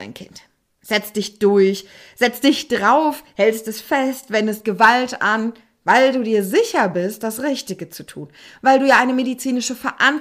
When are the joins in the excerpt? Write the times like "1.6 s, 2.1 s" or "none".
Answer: none